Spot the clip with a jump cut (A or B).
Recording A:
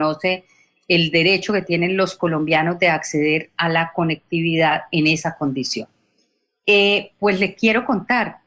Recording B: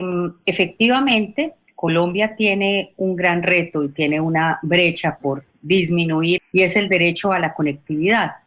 B